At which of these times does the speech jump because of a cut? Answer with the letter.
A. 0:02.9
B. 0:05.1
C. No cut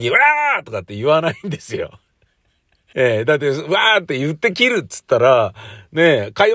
A